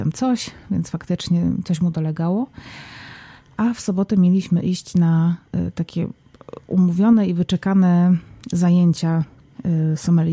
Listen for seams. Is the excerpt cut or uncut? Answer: uncut